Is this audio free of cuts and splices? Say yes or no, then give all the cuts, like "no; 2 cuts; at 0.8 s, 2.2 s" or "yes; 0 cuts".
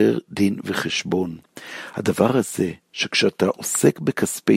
yes; 0 cuts